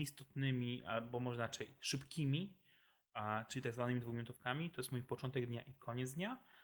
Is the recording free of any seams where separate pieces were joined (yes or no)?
yes